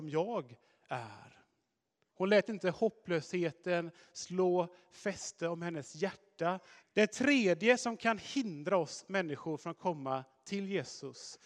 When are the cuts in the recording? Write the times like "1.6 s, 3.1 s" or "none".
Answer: 2.1 s, 6.8 s